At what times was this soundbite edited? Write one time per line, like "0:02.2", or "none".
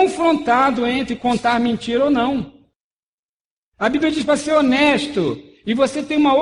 none